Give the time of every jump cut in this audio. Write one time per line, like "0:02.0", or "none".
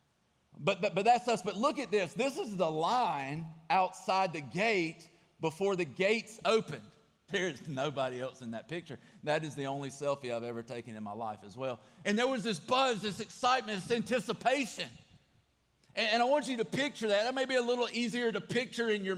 0:07.3
0:12.0